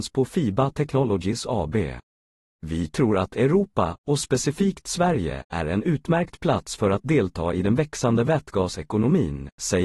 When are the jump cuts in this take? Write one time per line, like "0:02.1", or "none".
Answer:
0:02.5